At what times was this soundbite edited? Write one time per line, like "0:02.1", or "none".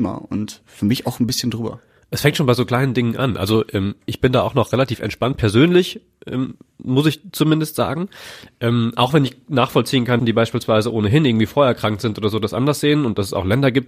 0:10.2

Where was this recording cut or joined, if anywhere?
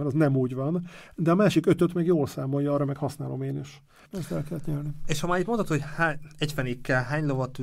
0:04.0

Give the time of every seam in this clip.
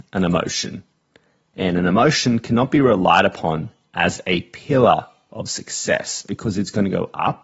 none

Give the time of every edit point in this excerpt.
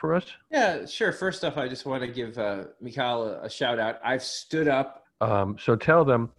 0:05.0

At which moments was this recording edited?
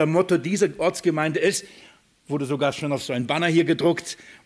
none

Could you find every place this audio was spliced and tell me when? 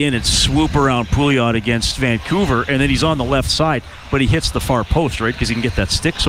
none

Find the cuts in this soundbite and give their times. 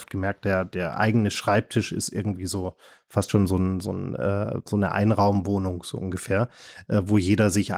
none

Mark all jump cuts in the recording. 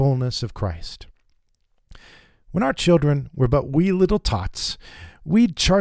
none

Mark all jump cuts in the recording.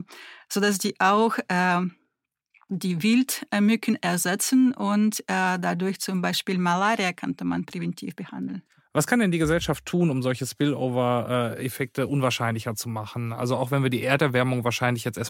none

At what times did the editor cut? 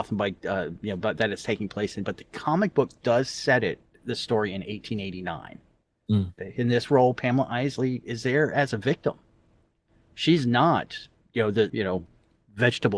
0:06.4
0:11.7

